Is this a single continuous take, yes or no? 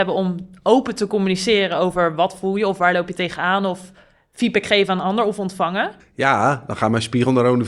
no